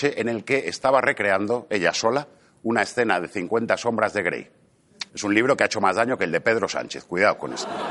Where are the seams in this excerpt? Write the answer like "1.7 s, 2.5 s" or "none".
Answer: 5.1 s